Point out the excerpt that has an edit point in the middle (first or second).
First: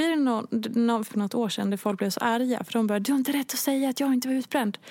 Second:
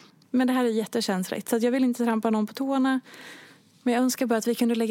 first